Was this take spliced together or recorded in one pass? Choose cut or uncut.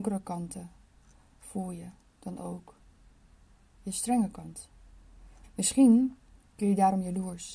cut